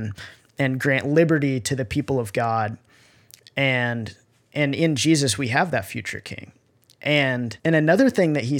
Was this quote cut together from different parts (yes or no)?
yes